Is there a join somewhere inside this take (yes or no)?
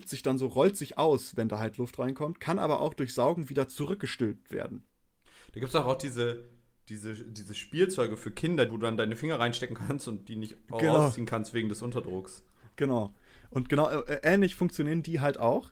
yes